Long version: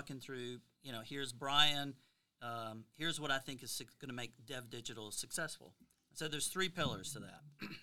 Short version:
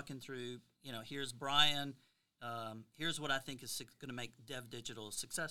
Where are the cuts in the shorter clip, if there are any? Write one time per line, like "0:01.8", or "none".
none